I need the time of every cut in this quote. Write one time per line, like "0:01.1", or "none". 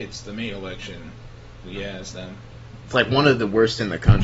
0:01.6
0:02.8